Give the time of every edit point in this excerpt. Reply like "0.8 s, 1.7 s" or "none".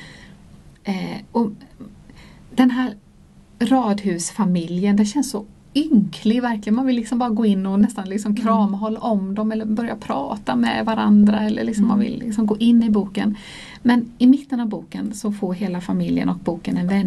none

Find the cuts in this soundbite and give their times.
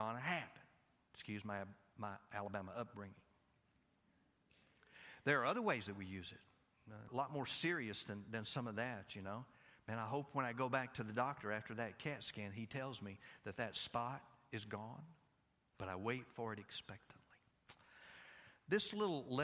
7.1 s, 15.7 s

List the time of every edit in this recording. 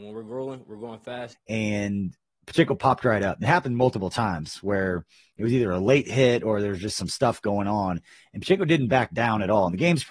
1.3 s

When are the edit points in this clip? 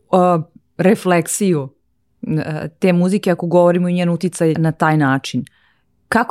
4.5 s

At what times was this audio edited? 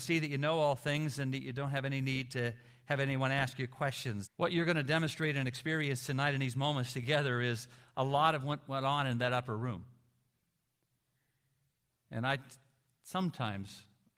4.2 s

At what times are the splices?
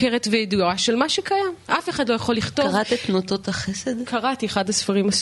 none

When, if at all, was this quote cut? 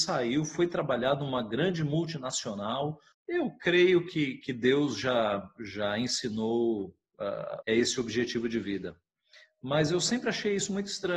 3.1 s, 7.6 s

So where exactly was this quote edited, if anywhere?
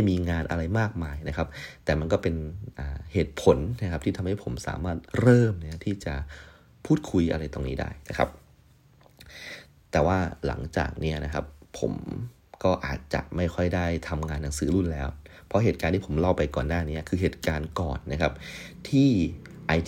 5.1 s

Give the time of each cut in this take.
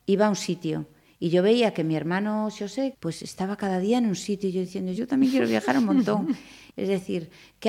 2.9 s, 5.0 s, 6.7 s

